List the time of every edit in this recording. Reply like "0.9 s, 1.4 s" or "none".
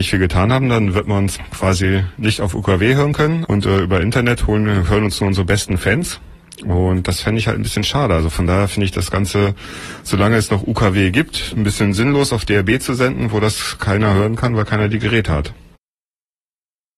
3.4 s